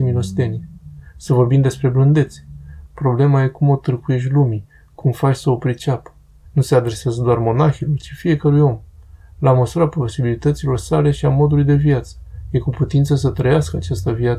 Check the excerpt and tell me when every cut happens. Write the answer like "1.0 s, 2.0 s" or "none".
2.9 s, 6.4 s